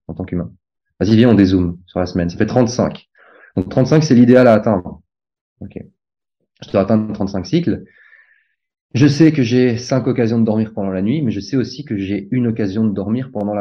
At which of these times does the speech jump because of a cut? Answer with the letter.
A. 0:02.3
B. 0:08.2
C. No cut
C